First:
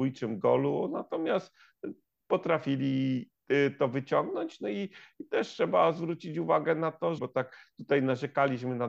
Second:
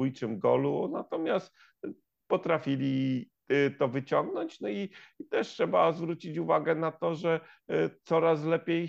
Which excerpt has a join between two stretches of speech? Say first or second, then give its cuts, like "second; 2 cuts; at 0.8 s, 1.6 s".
first; 1 cut; at 7.2 s